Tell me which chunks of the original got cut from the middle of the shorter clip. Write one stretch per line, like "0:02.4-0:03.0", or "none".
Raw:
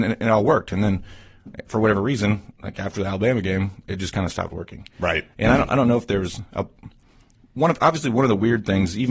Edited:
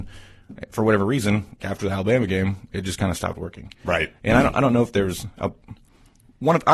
0:02.6-0:02.7